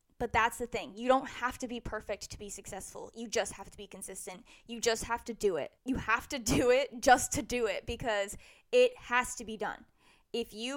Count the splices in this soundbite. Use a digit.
1